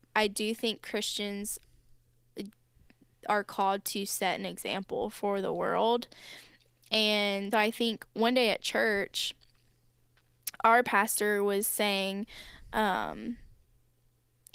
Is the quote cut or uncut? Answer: cut